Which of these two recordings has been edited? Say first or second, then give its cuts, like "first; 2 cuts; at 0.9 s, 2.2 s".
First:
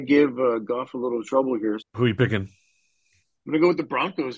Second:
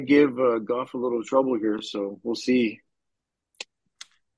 first; 1 cut; at 1.8 s